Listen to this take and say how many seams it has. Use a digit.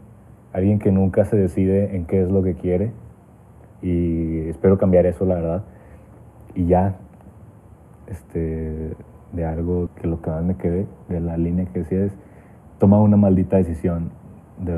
1